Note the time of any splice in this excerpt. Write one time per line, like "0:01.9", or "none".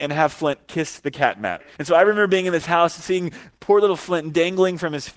0:01.8